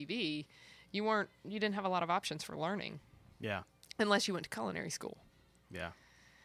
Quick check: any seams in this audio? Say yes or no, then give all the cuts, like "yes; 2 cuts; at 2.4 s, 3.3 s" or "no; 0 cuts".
no; 0 cuts